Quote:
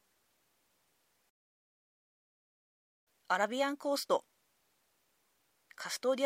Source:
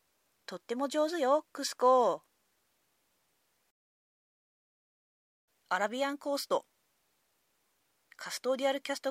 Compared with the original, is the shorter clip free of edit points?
yes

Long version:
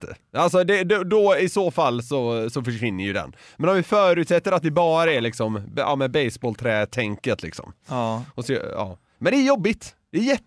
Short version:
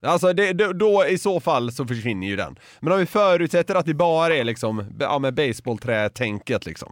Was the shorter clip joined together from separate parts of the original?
yes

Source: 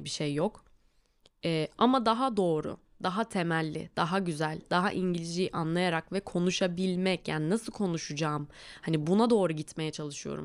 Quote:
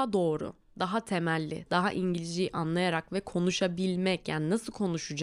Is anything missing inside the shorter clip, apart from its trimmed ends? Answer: yes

